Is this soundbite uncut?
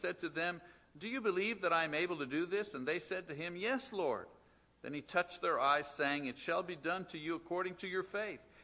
yes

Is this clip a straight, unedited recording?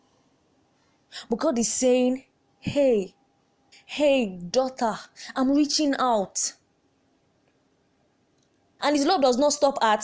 no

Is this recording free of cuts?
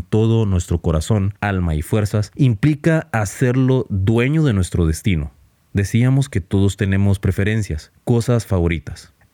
yes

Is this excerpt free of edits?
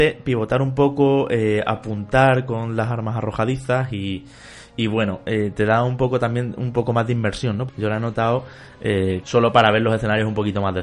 no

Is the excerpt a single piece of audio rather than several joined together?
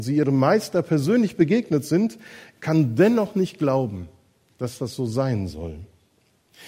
yes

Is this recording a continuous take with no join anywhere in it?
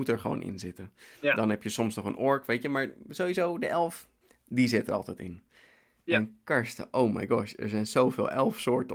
yes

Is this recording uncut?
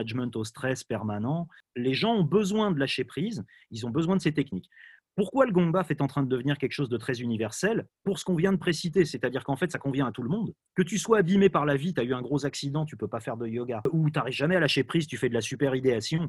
yes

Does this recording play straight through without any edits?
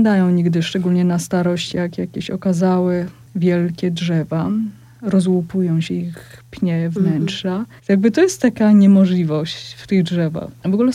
no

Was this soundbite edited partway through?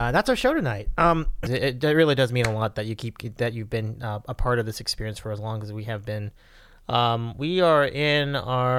yes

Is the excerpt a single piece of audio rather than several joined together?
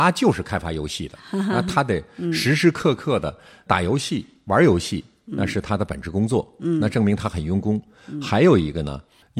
yes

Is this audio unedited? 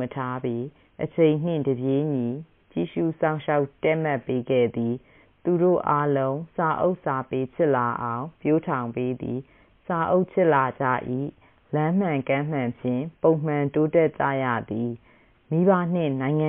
yes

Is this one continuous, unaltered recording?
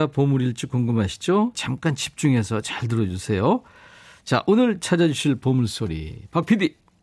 no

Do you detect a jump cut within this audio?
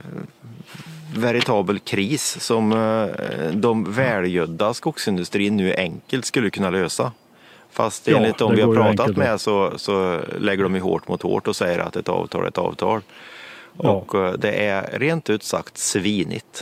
no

